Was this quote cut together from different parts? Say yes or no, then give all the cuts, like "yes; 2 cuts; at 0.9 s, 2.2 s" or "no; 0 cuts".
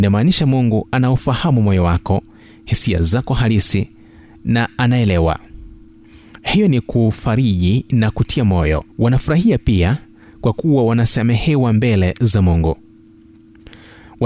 yes; 1 cut; at 8.9 s